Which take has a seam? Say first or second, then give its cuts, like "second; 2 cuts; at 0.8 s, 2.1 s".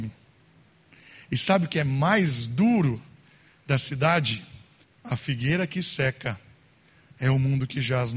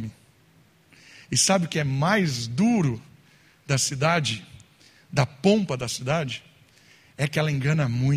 first; 1 cut; at 4.8 s